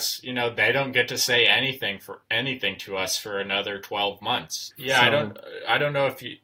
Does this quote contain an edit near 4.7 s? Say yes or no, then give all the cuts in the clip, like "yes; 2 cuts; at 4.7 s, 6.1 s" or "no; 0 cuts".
yes; 1 cut; at 4.7 s